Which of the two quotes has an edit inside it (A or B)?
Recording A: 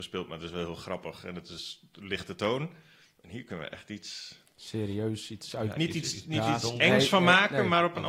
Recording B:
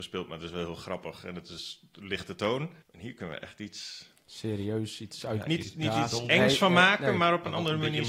B